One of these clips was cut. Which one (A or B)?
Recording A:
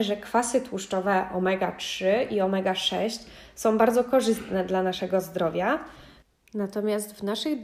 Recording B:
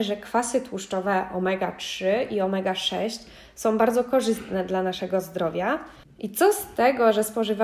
B